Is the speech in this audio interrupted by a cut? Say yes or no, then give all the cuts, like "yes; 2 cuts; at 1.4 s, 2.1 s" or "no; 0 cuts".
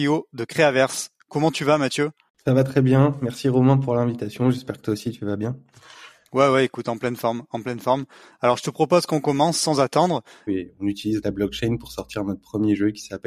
yes; 1 cut; at 10.5 s